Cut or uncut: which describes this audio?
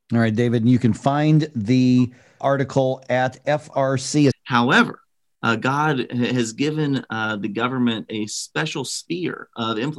cut